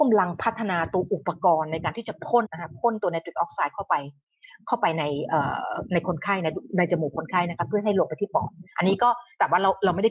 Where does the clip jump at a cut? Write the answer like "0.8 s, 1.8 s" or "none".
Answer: 2.4 s